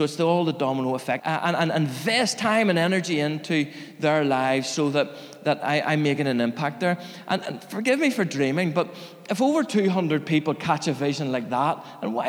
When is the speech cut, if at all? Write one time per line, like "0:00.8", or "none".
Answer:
0:01.2